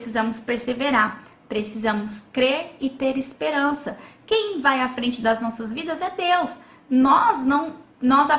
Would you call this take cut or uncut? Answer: uncut